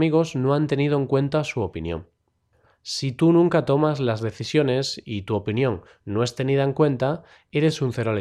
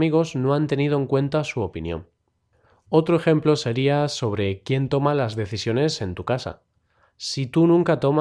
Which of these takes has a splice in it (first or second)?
first